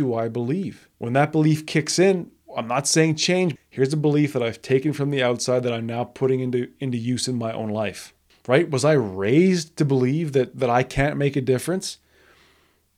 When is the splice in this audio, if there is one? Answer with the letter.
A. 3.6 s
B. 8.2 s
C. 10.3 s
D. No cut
A